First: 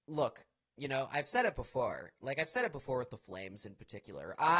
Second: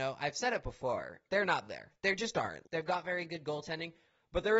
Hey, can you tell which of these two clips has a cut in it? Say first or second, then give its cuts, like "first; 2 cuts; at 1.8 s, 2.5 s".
second; 2 cuts; at 1.3 s, 2.6 s